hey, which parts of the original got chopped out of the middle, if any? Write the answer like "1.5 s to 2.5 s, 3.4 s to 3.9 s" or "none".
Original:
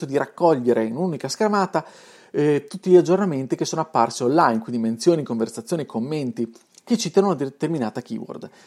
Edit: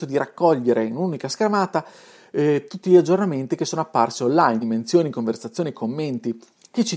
4.6 s to 4.7 s